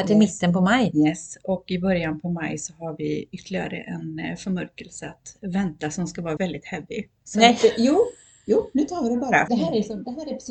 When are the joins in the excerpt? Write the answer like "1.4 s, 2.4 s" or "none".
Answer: 6.4 s, 9.5 s